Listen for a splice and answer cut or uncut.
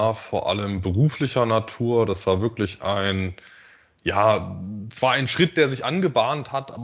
uncut